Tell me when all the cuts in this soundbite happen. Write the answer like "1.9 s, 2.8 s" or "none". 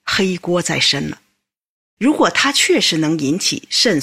2.0 s